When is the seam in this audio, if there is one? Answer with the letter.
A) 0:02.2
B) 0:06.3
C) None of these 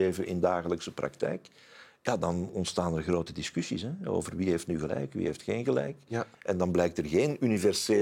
B